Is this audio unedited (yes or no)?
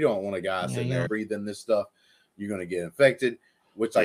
no